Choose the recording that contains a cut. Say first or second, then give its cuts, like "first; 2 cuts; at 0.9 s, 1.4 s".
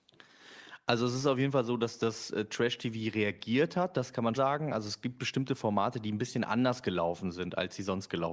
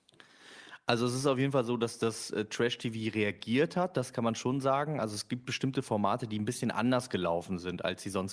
first; 1 cut; at 4.3 s